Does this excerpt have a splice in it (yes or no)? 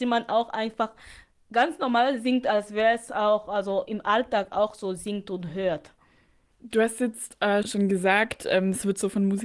yes